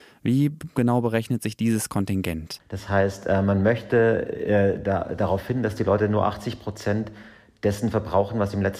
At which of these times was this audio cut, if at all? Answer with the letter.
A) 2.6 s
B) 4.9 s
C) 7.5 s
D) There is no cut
A